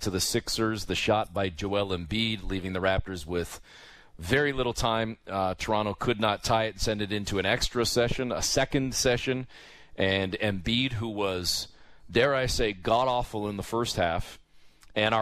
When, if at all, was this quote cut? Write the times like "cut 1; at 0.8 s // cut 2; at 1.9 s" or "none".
none